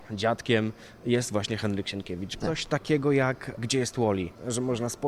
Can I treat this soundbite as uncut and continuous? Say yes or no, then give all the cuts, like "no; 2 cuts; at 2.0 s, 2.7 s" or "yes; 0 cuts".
no; 1 cut; at 2.4 s